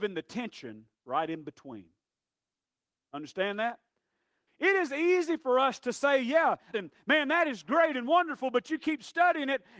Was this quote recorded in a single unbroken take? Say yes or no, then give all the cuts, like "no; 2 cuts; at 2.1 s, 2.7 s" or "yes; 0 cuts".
no; 2 cuts; at 4.5 s, 6.7 s